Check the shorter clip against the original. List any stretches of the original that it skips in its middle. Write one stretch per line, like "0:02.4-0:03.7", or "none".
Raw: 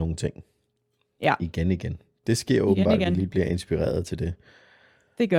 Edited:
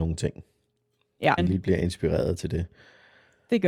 0:01.4-0:03.1